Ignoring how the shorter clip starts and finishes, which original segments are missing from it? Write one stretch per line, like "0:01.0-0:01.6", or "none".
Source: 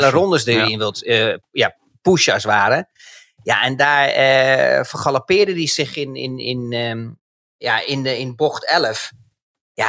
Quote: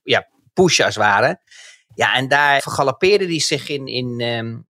0:04.1-0:04.9
0:06.1-0:06.4